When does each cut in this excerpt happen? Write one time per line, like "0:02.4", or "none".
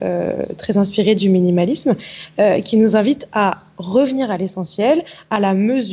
none